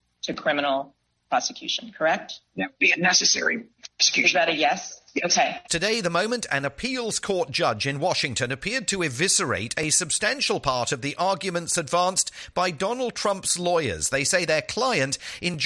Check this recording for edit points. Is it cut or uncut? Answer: cut